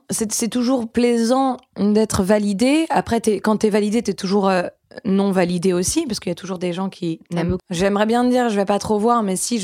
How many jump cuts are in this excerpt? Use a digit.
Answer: 1